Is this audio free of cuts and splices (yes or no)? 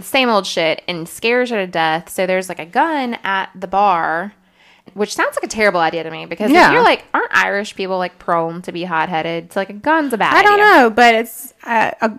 yes